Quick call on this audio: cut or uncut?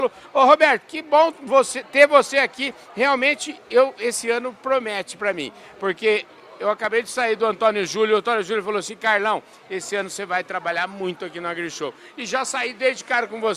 uncut